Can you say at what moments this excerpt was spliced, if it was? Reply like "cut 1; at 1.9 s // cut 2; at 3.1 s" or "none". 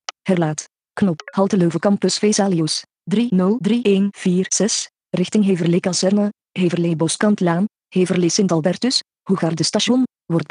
none